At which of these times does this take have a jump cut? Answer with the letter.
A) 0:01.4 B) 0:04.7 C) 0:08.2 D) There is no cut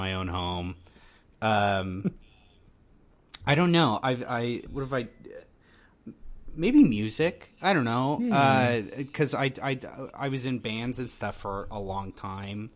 B